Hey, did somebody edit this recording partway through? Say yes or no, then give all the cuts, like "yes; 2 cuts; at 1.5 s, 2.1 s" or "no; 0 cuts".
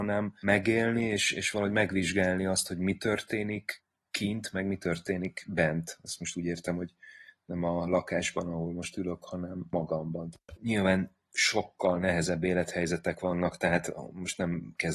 yes; 1 cut; at 10.6 s